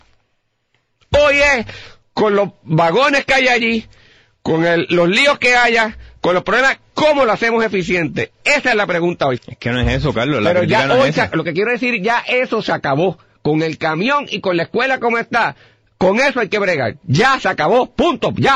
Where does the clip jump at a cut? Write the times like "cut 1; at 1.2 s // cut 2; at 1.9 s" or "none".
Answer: cut 1; at 9.4 s